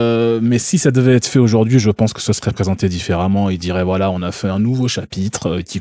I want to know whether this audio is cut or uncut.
uncut